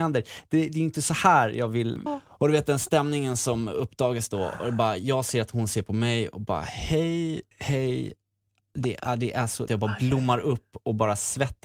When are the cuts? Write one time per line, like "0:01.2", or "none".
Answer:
0:02.1
0:07.5
0:09.7